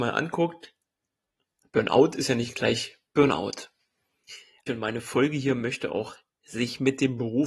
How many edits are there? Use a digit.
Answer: 1